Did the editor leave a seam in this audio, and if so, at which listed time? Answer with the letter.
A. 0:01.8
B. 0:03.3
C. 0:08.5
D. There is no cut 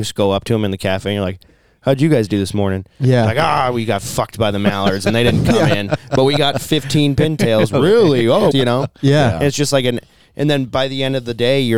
C